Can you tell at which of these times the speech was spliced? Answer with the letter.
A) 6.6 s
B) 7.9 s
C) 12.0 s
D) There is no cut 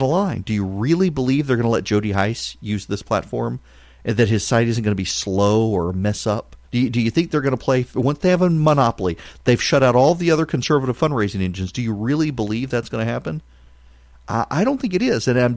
A